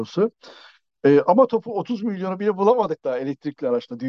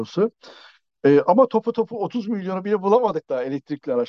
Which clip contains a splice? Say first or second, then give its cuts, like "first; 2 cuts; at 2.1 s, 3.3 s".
first; 1 cut; at 1.5 s